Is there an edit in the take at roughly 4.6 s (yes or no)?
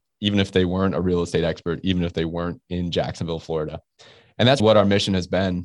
yes